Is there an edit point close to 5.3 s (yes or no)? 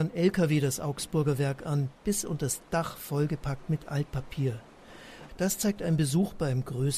yes